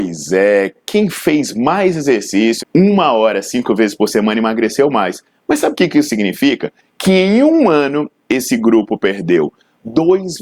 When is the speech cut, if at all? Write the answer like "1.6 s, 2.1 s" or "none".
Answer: 2.6 s